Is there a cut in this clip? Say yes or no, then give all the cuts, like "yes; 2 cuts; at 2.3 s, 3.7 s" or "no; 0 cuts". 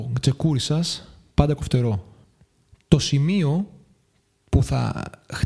no; 0 cuts